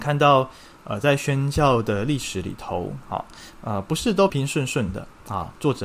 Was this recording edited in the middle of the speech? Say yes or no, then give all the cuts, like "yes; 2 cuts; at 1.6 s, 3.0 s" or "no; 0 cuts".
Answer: yes; 1 cut; at 4.3 s